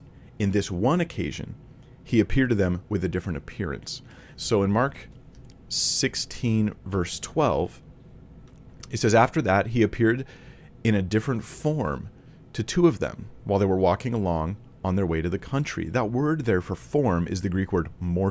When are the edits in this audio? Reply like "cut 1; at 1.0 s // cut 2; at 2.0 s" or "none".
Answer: cut 1; at 4.3 s